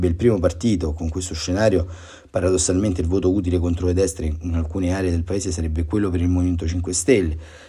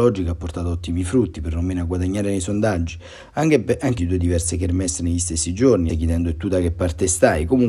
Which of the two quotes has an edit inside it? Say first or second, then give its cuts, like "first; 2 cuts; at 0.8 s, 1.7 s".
second; 2 cuts; at 4.0 s, 5.9 s